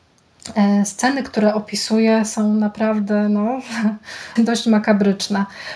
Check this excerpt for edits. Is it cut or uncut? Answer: cut